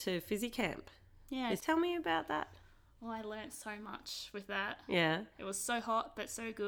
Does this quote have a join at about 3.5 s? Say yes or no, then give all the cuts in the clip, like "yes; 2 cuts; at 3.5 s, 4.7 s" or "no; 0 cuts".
no; 1 cut; at 1.6 s